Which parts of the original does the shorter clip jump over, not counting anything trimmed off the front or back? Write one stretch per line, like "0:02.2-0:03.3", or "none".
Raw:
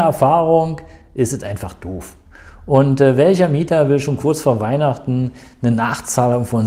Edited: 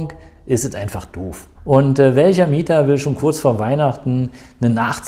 0:02.2-0:02.6